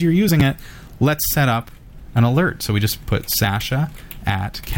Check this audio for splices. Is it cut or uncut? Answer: uncut